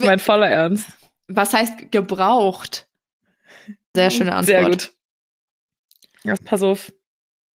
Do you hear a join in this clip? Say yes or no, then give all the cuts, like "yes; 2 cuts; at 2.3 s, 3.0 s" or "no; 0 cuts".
yes; 2 cuts; at 3.9 s, 6.4 s